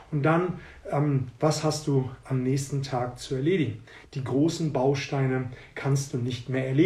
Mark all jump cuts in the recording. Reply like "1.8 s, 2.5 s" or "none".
1.4 s, 4.0 s